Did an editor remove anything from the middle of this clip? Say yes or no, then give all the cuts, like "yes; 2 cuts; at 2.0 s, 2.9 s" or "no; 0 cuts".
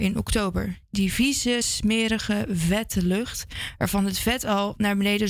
no; 0 cuts